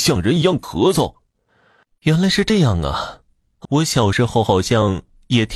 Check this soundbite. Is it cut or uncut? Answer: cut